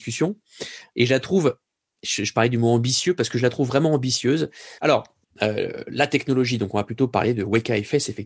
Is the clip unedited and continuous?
no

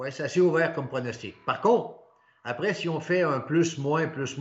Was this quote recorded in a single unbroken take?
yes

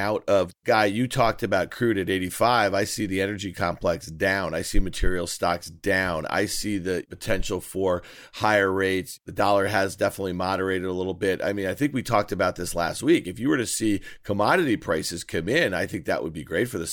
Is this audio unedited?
yes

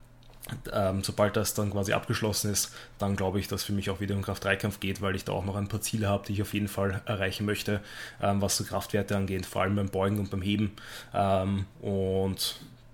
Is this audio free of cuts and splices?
yes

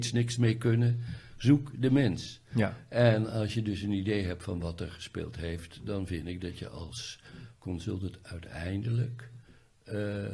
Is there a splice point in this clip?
no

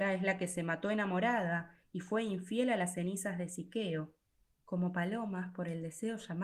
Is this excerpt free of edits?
no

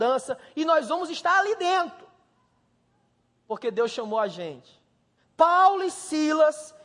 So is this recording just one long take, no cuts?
no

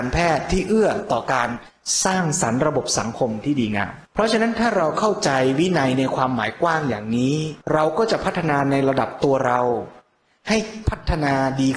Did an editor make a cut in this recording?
yes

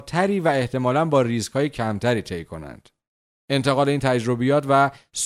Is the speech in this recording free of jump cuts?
yes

